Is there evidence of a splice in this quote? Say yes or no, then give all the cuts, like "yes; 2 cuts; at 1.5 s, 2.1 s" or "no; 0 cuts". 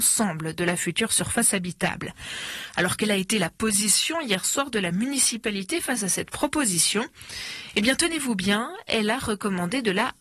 no; 0 cuts